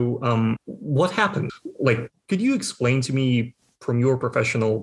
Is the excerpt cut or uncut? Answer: uncut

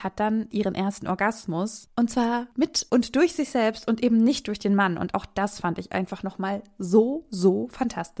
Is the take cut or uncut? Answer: uncut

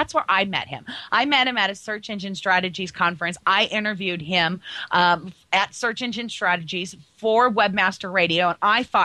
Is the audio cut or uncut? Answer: uncut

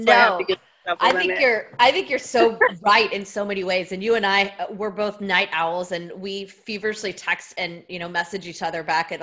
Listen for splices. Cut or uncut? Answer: uncut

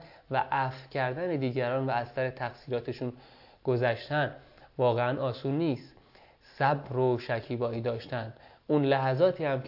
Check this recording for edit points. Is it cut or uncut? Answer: uncut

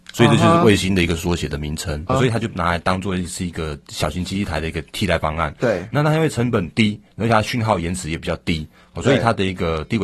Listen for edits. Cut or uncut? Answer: cut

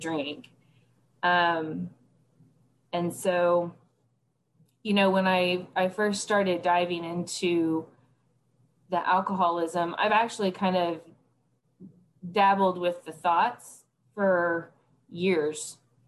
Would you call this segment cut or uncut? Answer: uncut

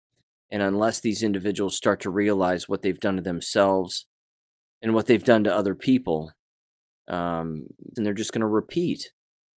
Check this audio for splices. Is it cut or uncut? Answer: cut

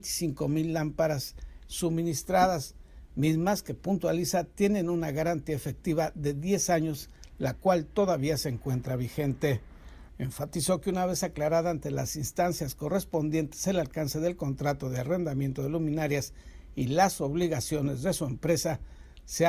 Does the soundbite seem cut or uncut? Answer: cut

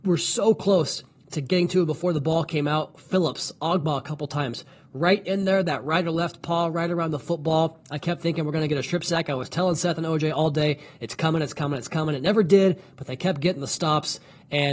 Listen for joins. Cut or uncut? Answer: uncut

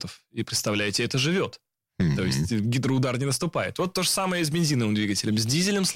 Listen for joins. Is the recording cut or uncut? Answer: uncut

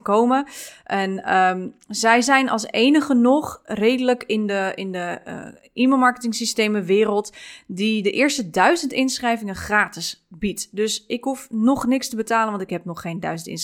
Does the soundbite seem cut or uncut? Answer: uncut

